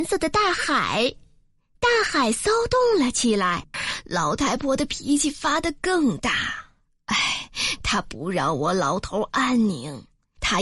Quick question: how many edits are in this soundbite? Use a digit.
1